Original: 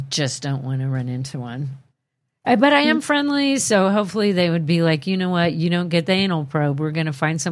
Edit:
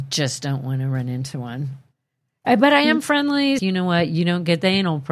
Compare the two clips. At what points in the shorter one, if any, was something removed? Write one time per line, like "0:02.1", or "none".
0:03.6